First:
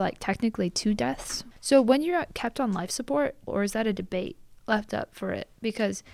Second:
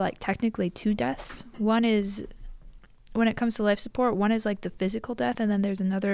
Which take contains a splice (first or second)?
first